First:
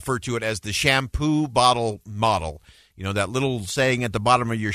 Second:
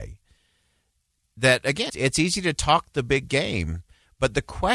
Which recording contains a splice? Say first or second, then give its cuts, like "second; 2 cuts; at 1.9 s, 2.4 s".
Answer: second; 1 cut; at 1.9 s